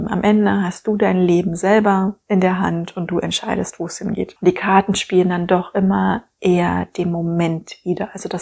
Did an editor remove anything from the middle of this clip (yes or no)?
no